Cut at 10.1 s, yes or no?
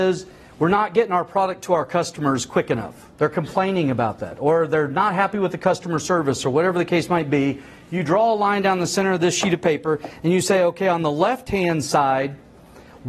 no